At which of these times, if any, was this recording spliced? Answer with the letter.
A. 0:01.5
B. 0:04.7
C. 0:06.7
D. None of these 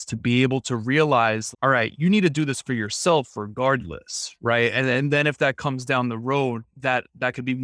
A